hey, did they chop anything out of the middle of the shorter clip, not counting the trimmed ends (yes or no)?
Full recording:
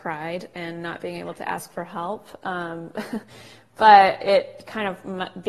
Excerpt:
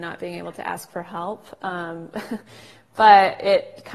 no